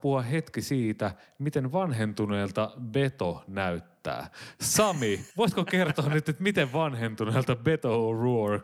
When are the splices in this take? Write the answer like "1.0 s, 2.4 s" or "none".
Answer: 5.3 s